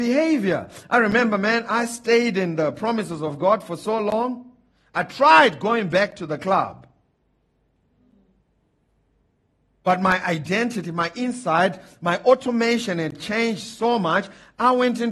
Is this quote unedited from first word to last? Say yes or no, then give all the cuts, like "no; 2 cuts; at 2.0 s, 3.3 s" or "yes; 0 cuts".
yes; 0 cuts